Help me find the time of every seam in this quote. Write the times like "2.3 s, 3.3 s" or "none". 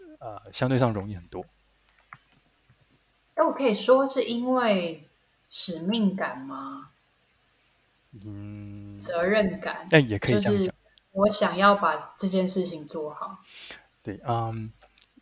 none